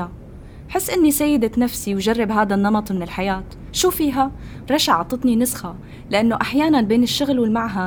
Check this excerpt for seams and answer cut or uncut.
cut